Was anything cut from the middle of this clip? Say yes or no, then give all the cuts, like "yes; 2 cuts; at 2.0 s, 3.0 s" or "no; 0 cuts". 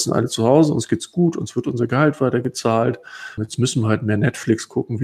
yes; 1 cut; at 3.4 s